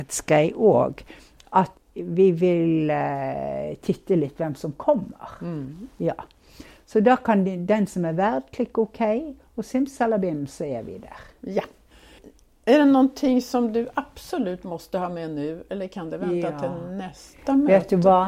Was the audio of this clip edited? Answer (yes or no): no